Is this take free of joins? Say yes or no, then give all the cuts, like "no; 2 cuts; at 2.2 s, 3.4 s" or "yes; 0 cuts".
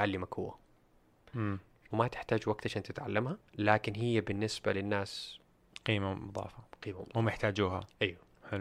no; 2 cuts; at 1.9 s, 3.5 s